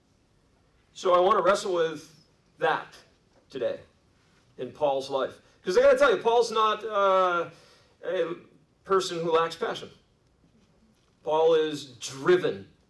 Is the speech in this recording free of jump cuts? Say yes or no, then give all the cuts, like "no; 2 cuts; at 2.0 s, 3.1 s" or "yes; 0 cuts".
yes; 0 cuts